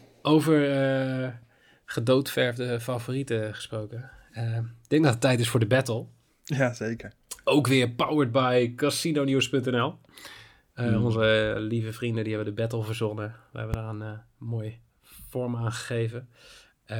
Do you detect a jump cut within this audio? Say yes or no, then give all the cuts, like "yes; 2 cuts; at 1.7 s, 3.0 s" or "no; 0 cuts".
no; 0 cuts